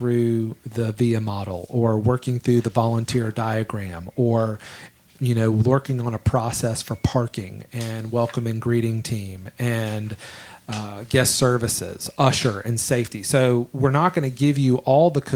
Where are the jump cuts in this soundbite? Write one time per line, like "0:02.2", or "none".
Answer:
none

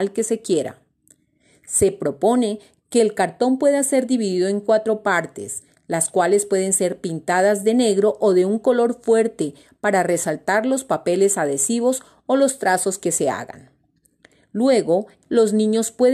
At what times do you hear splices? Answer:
0:15.2

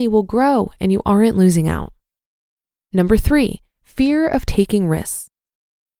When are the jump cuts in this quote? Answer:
none

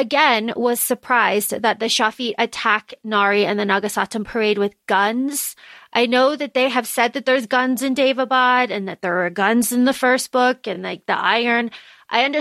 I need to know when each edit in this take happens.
none

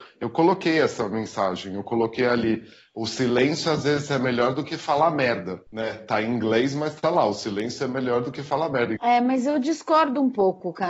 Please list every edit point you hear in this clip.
0:05.7
0:09.0

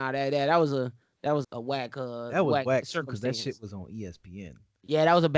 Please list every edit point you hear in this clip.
0:01.4

